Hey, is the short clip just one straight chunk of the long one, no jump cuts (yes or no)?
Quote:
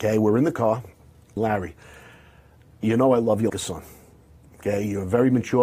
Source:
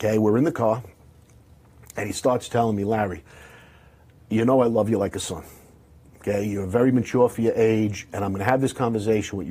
no